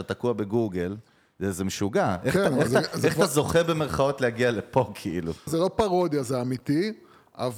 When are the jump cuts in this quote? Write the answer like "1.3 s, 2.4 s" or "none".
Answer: 5.5 s